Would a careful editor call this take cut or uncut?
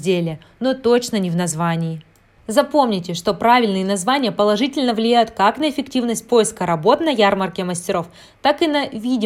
uncut